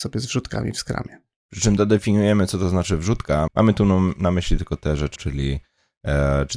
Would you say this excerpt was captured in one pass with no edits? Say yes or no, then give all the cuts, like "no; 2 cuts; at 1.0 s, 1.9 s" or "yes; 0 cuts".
no; 2 cuts; at 3.5 s, 5.2 s